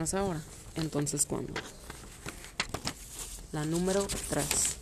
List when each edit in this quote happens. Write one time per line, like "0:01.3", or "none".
none